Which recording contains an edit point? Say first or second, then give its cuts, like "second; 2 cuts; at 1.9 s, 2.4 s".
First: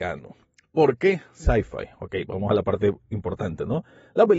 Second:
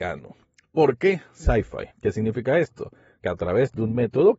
second; 1 cut; at 1.9 s